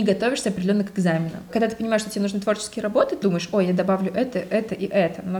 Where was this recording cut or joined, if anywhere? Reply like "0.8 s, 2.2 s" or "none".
3.2 s